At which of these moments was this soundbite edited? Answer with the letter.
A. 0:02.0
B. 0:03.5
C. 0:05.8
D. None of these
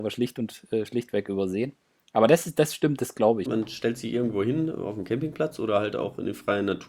B